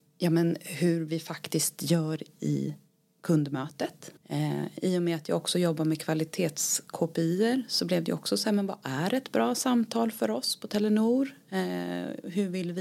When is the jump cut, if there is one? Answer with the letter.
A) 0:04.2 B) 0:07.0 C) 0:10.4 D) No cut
A